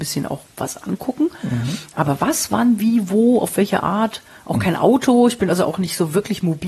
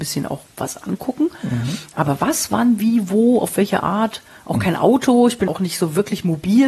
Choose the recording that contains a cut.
second; 1 cut; at 5.5 s

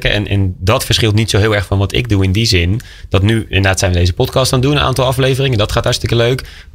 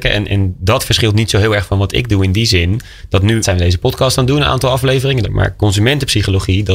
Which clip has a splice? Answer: second; 2 cuts; at 3.4 s, 5.2 s

